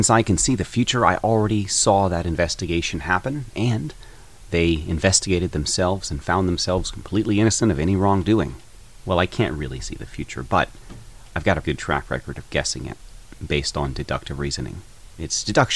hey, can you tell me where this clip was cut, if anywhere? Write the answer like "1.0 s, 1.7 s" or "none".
11.6 s